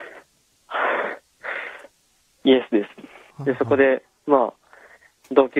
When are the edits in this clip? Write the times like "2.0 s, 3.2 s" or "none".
3.3 s